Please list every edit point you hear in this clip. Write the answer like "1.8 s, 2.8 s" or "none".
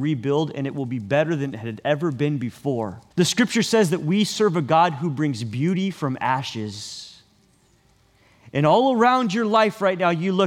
3.1 s